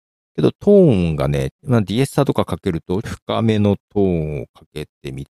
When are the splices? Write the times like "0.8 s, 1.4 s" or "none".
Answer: 1.5 s, 3.0 s